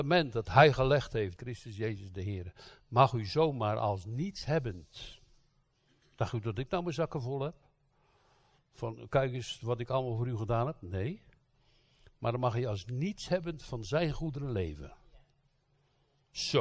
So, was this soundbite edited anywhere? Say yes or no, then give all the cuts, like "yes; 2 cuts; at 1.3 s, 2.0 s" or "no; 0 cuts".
yes; 1 cut; at 1.4 s